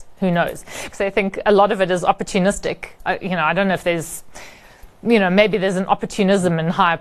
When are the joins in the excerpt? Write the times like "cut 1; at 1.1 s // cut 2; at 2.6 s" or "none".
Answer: cut 1; at 0.9 s // cut 2; at 3.0 s